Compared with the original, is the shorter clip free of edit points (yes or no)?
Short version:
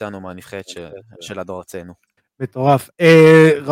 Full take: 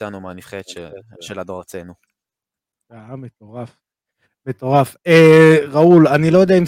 no